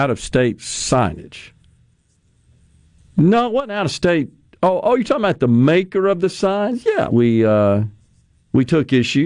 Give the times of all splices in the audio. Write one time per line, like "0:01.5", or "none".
0:07.1